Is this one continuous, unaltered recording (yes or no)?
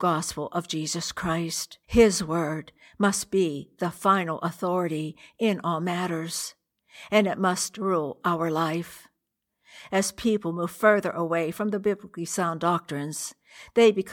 no